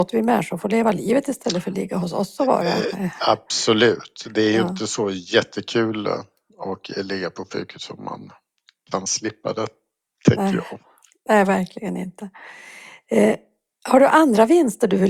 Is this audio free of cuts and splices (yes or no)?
yes